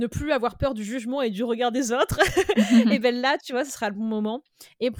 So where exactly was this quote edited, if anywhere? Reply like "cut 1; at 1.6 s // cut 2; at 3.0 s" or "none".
none